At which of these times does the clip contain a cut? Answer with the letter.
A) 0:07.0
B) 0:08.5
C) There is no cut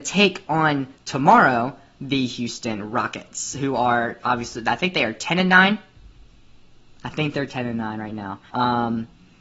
B